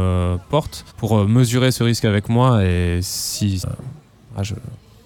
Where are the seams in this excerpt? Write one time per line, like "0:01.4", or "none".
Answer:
0:00.9
0:03.6

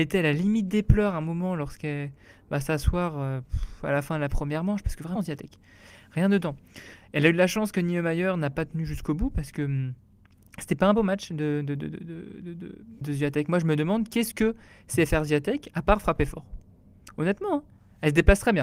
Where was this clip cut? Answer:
0:05.2
0:13.0

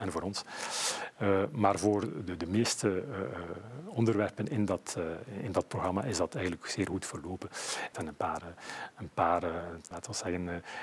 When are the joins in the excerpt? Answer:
0:07.9
0:09.9

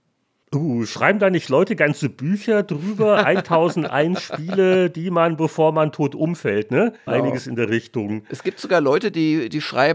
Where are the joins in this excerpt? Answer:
0:07.1

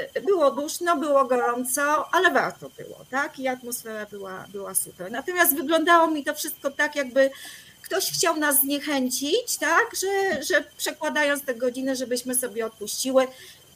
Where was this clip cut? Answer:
none

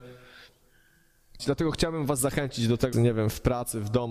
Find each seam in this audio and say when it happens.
0:01.4
0:02.9

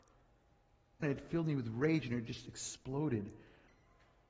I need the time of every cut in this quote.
0:01.0

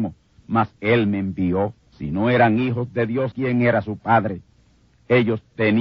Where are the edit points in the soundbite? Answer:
0:01.9
0:03.3

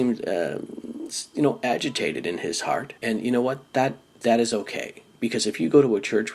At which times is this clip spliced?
0:03.0

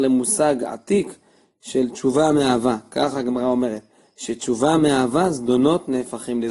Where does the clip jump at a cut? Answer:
none

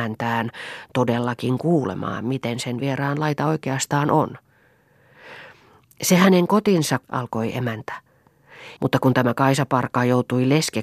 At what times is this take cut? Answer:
0:07.0
0:08.8

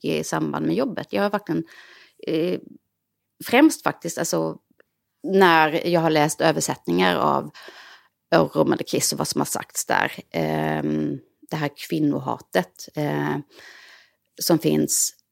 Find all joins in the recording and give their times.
none

